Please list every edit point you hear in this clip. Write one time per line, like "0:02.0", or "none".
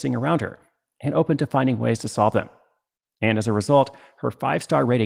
0:03.1

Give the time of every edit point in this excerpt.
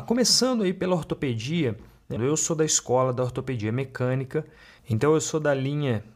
0:02.2

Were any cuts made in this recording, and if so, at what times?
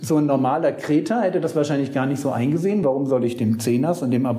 none

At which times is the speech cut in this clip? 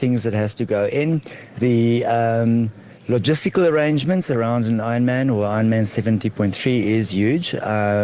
0:01.5
0:03.0

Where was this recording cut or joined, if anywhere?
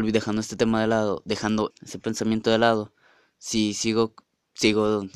0:01.7

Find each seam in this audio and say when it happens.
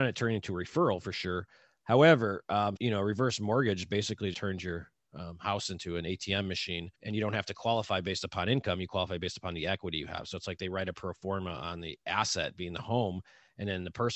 0:02.8
0:04.3
0:06.9

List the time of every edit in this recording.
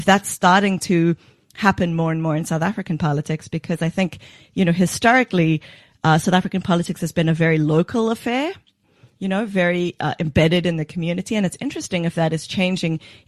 none

